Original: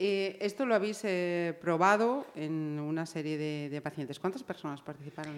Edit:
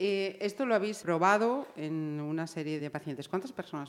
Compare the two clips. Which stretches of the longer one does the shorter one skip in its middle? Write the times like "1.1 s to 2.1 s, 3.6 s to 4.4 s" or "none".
1.0 s to 1.6 s, 3.4 s to 3.7 s